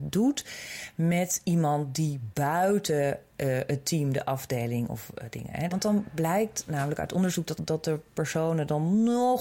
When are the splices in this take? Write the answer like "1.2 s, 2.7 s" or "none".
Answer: 5.7 s, 7.6 s